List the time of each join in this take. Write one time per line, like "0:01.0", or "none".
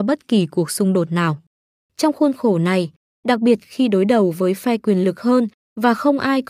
0:03.1